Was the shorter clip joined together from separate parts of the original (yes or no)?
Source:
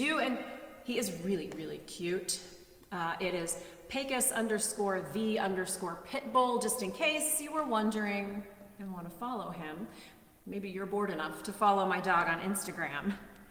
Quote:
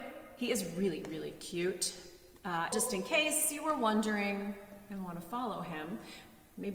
yes